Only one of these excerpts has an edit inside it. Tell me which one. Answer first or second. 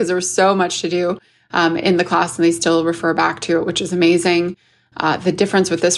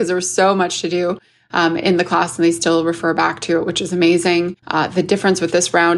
second